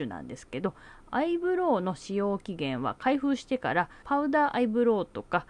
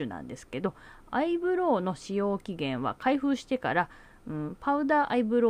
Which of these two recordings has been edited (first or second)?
first